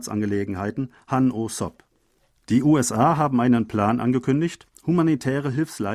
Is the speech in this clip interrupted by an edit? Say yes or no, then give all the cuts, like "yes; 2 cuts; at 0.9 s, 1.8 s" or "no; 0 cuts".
no; 0 cuts